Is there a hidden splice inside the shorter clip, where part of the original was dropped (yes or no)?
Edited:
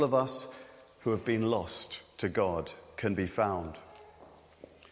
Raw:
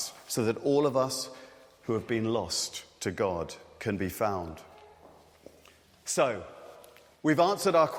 no